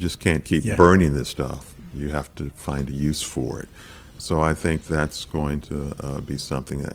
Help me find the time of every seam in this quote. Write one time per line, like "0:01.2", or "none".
none